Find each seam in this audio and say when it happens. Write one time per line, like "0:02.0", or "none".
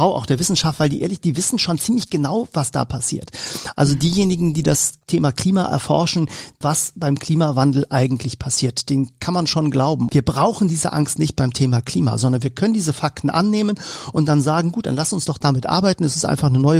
0:06.6
0:10.1